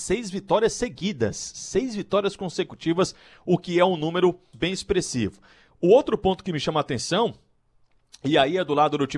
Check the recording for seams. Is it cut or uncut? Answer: cut